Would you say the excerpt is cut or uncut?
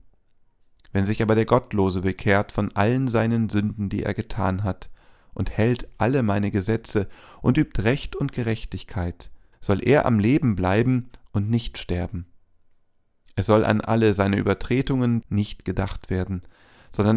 cut